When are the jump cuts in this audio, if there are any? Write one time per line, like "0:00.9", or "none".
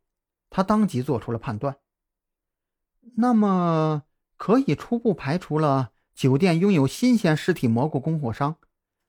none